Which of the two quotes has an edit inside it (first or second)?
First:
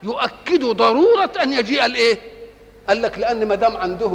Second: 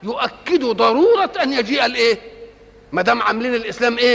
first